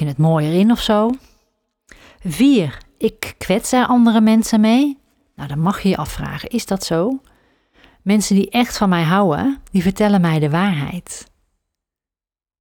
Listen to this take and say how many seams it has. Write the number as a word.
zero